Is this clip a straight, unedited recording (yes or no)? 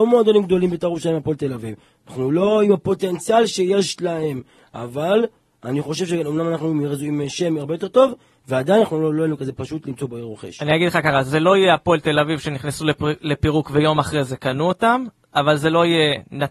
yes